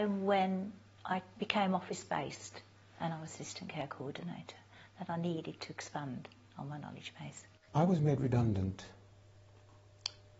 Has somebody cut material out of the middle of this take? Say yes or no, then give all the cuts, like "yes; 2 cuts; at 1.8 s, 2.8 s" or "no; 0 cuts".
yes; 1 cut; at 7.7 s